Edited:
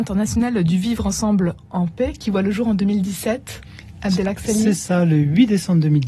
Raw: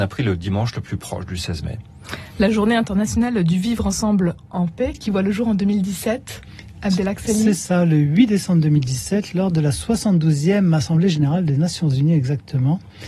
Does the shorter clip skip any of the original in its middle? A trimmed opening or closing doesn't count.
no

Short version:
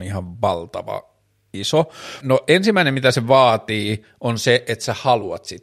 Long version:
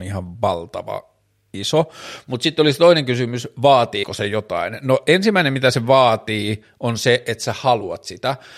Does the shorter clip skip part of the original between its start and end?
yes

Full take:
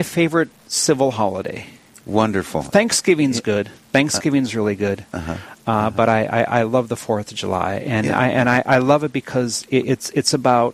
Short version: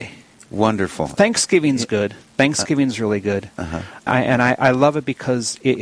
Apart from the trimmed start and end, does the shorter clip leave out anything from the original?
yes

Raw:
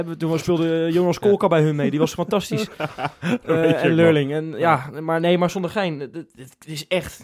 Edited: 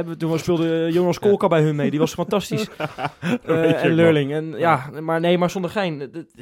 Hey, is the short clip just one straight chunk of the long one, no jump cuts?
yes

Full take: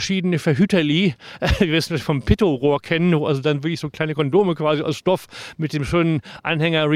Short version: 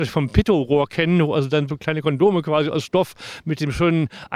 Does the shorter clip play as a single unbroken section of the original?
no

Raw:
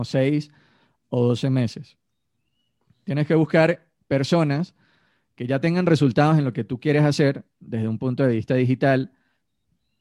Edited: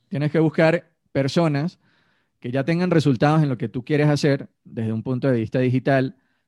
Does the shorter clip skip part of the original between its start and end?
no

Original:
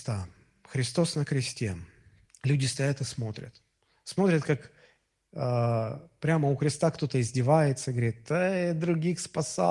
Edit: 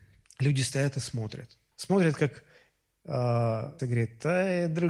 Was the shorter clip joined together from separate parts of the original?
yes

